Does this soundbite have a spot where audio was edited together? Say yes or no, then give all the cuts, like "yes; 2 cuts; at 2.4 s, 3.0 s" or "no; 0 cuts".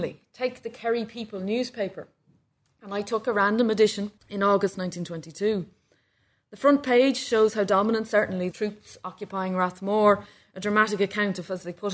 yes; 2 cuts; at 4.2 s, 8.5 s